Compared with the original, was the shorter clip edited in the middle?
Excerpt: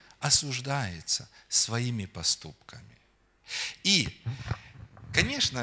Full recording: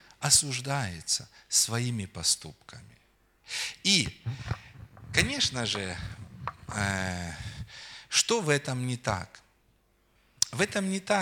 no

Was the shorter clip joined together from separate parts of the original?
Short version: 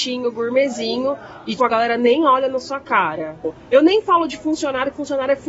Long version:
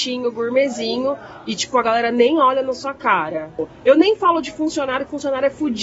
yes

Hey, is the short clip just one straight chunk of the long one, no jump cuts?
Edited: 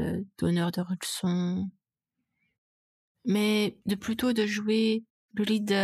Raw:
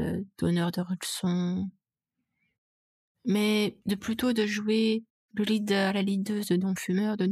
yes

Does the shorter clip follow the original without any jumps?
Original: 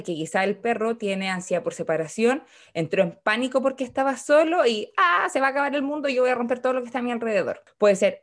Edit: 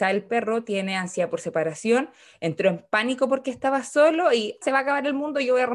no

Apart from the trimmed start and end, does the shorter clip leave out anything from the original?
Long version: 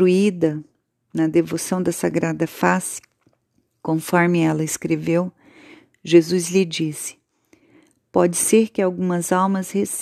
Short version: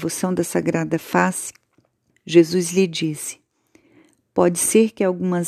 yes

